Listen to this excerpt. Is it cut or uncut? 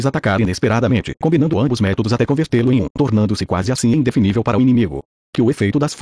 uncut